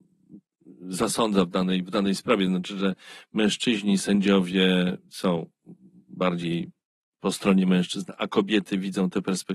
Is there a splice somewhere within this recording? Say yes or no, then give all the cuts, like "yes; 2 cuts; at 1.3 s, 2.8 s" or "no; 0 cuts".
no; 0 cuts